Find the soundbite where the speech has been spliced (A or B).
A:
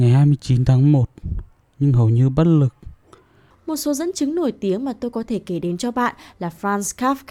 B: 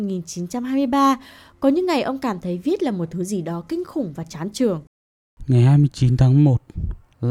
A